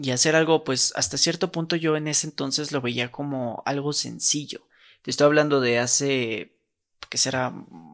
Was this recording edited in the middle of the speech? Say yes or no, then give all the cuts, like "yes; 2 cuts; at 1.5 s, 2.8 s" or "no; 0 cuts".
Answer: no; 0 cuts